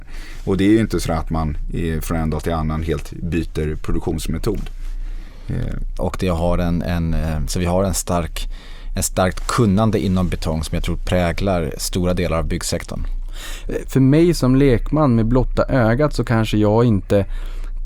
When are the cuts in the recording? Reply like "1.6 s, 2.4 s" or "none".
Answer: 6.0 s, 13.8 s